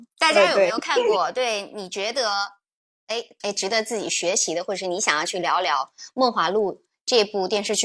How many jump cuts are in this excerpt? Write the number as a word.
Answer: one